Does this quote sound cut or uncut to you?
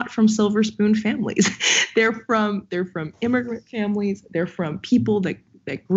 uncut